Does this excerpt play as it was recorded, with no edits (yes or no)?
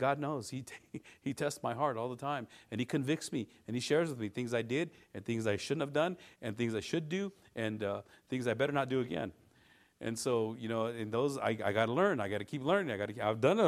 yes